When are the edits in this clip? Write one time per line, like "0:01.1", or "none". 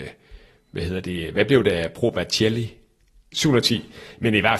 0:03.3